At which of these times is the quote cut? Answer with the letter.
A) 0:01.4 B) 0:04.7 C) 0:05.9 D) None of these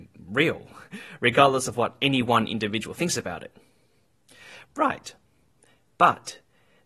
B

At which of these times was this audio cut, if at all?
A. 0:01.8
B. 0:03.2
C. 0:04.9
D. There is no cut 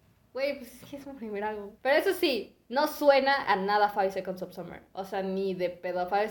A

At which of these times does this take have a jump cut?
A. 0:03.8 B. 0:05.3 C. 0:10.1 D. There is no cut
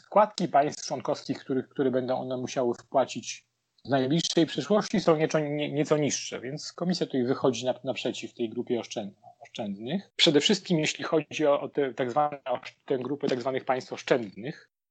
C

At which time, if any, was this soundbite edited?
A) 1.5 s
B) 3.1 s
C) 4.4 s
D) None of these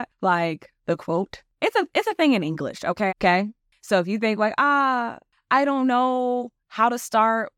B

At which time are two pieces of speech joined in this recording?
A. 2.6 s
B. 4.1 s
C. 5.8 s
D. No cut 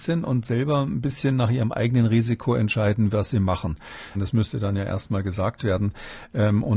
B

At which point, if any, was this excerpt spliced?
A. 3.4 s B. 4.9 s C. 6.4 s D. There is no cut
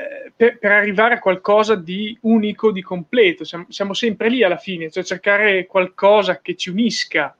C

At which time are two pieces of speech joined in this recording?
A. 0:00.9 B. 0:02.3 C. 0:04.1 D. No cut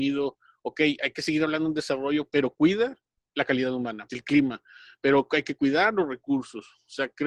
C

